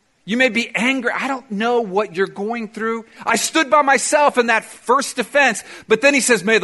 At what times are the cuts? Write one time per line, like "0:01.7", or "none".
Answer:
0:03.2